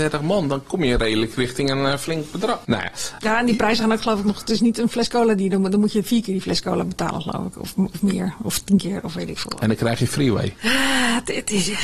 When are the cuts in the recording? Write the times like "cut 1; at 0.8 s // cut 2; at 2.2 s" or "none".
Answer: none